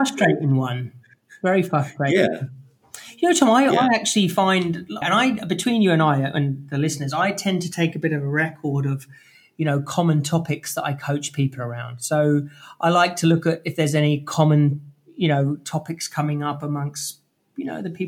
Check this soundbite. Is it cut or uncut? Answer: cut